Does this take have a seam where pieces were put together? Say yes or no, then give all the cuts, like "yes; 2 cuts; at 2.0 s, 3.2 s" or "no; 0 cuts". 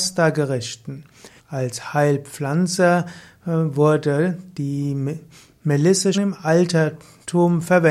yes; 2 cuts; at 1.4 s, 6.1 s